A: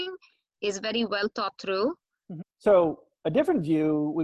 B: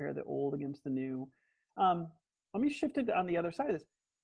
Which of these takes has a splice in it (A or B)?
A